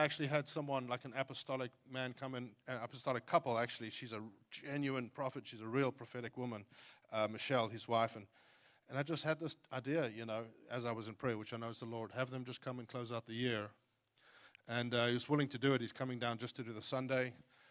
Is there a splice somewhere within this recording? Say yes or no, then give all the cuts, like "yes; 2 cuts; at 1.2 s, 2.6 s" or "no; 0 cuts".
no; 0 cuts